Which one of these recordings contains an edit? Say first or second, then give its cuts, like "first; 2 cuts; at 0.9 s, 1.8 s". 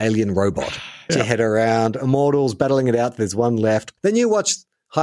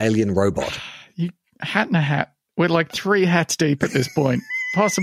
first; 2 cuts; at 1.1 s, 4.0 s